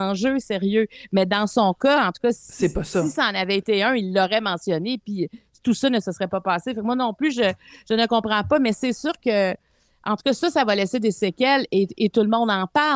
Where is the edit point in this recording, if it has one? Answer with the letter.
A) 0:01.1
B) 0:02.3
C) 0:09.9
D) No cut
D